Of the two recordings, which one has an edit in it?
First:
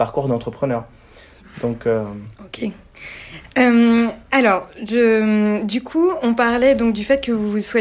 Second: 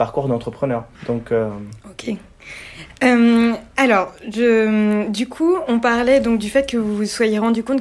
second; 1 cut; at 0.9 s

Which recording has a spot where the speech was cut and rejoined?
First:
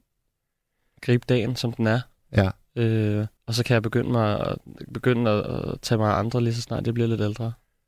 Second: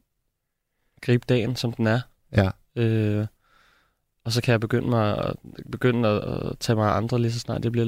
first; 1 cut; at 3.4 s

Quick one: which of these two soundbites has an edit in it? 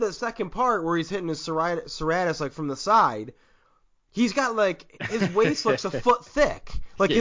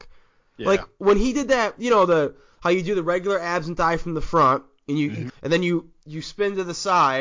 second; 1 cut; at 5.3 s

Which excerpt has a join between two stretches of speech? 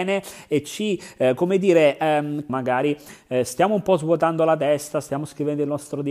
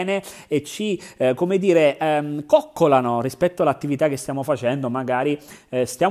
first; 1 cut; at 2.5 s

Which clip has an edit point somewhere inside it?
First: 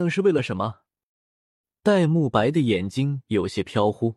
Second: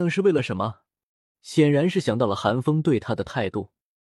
second; 1 cut; at 1.3 s

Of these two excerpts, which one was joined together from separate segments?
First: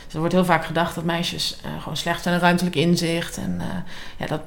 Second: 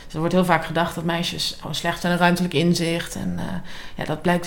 second; 1 cut; at 1.6 s

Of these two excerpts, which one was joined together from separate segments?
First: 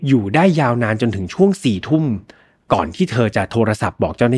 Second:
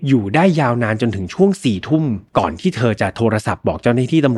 second; 1 cut; at 2.3 s

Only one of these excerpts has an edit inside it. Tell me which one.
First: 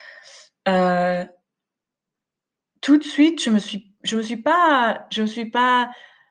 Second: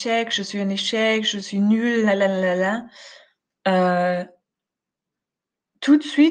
second; 1 cut; at 3.5 s

